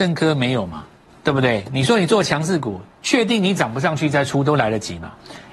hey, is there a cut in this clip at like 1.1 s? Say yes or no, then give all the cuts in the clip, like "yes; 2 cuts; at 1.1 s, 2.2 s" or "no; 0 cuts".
yes; 1 cut; at 1.1 s